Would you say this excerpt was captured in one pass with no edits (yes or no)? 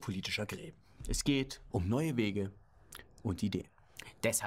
no